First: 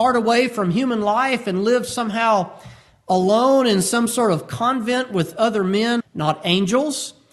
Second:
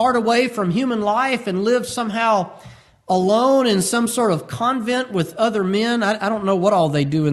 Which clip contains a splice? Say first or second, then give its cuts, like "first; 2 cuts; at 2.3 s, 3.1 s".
first; 1 cut; at 6.0 s